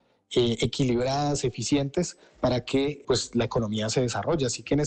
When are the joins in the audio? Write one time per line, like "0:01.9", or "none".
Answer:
0:03.0